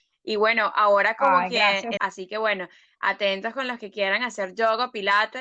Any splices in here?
yes; 1 cut; at 2.0 s

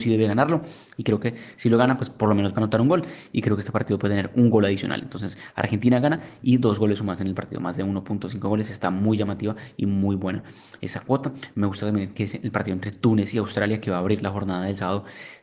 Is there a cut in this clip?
no; 0 cuts

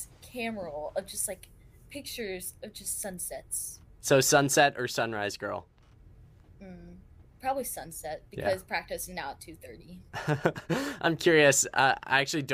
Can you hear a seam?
no; 0 cuts

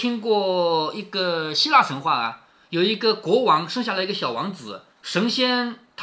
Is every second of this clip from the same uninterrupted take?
no; 1 cut; at 4.9 s

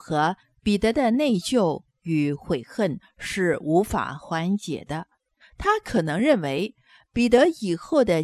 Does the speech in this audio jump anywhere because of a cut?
yes; 1 cut; at 5.4 s

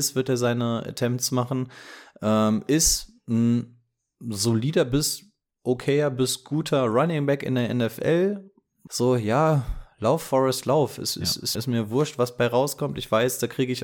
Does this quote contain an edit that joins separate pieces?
yes; 2 cuts; at 8.9 s, 11.5 s

